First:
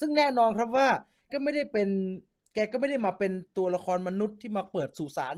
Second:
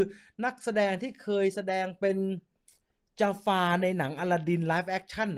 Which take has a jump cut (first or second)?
first